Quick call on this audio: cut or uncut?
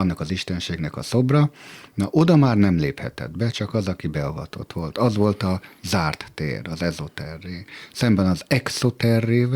uncut